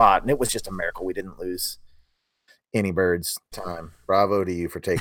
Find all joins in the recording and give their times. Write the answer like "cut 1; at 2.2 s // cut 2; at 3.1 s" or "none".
cut 1; at 3.5 s

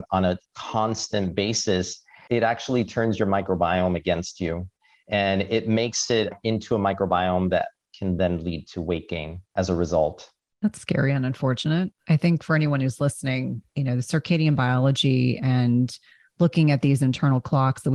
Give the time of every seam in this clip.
none

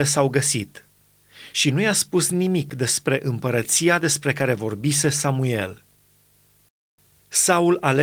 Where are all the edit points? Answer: none

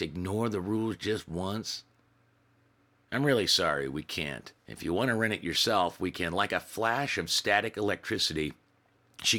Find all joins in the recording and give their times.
cut 1; at 4.6 s

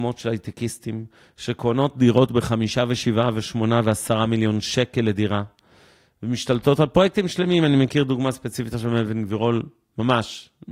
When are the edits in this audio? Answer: none

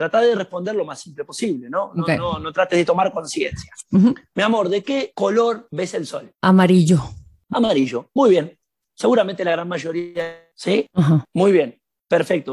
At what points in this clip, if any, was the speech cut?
cut 1; at 3.8 s

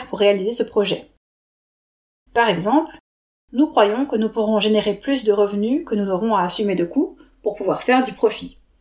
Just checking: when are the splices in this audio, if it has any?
cut 1; at 2.3 s

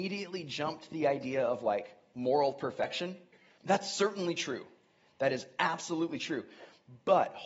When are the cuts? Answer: cut 1; at 3.6 s

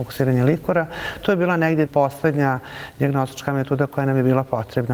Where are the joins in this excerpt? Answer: cut 1; at 1.9 s

